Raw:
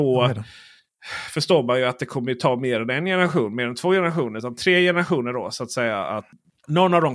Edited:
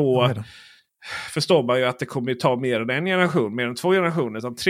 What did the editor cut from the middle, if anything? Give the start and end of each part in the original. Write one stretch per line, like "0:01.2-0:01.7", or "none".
none